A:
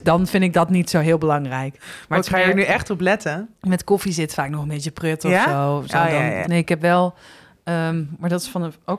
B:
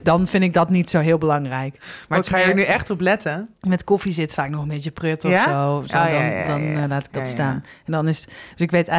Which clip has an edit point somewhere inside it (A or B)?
A